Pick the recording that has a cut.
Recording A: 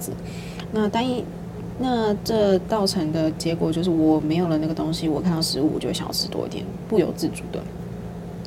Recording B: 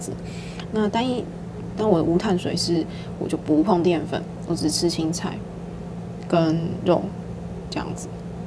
B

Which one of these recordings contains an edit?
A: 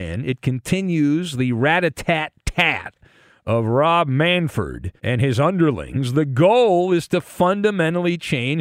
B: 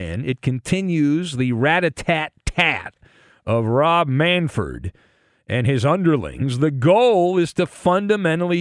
A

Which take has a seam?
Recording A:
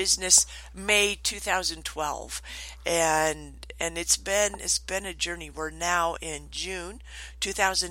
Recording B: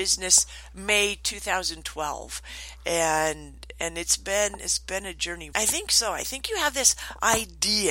B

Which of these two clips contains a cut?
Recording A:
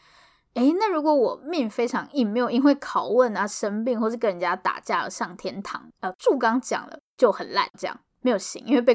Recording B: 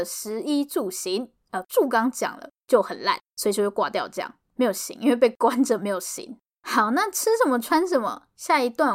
A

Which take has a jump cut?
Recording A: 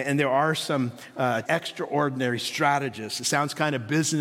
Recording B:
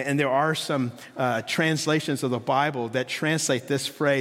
A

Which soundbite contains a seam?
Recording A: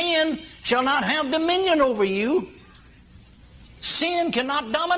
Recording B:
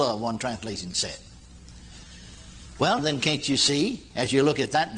B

